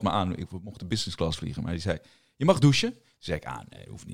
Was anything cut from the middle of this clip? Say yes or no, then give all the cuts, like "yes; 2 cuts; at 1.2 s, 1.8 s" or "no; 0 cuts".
no; 0 cuts